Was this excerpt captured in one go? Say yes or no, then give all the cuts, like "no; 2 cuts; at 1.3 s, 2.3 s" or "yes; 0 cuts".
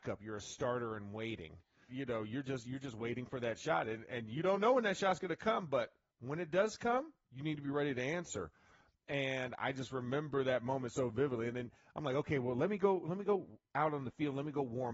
no; 1 cut; at 1.9 s